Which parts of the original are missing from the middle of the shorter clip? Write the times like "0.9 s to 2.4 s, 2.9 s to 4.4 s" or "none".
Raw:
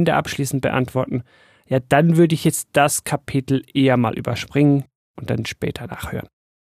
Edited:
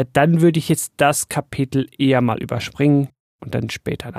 none